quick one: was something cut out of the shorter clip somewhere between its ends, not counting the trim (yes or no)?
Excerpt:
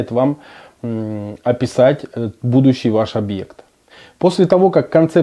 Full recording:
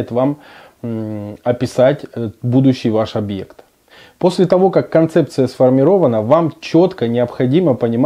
no